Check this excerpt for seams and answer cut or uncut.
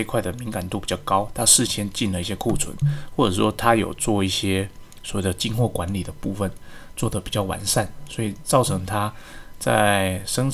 cut